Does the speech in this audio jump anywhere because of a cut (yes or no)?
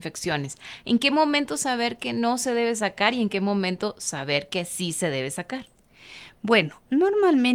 no